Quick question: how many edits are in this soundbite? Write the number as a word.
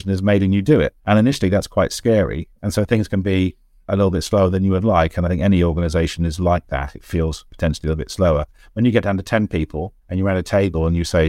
one